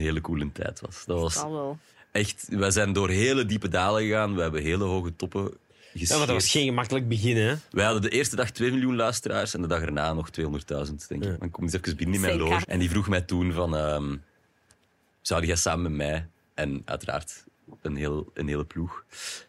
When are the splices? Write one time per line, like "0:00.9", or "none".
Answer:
0:11.3
0:12.6

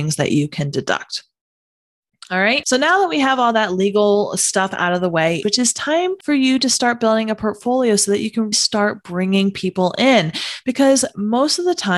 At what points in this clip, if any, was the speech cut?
0:05.4
0:08.5

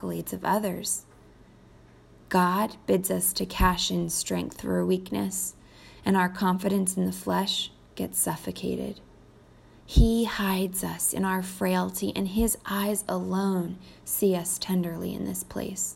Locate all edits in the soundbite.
none

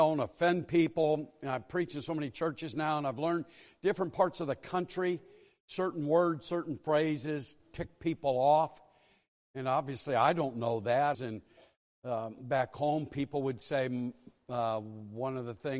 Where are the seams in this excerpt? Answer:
0:11.1

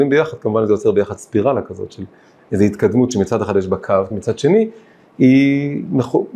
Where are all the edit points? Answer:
0:04.1

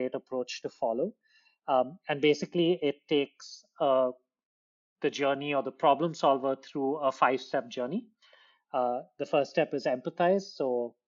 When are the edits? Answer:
none

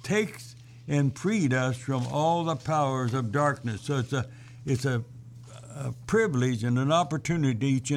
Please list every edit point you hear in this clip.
none

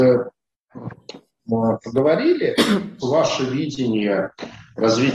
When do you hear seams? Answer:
0:03.0

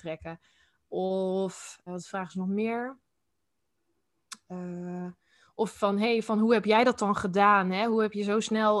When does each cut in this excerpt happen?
0:01.9

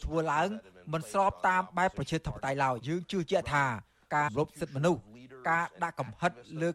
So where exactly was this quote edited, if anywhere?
0:02.8
0:04.3

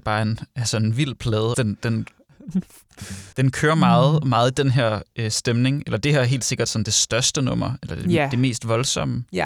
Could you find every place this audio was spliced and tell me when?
0:01.5
0:03.3

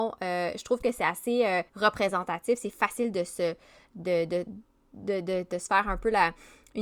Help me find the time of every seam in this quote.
0:01.7

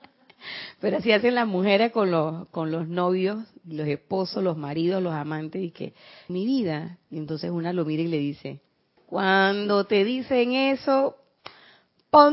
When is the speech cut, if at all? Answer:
0:06.3
0:09.0

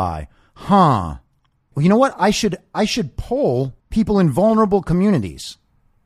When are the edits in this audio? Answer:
0:01.7
0:03.8

